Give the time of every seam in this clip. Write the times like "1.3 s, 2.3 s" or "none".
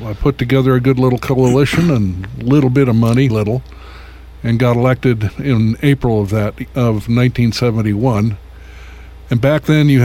3.3 s